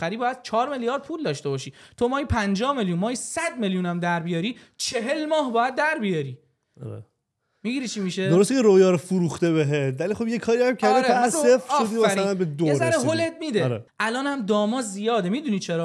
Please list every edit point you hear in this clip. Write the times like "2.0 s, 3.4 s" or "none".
11.3 s, 13.9 s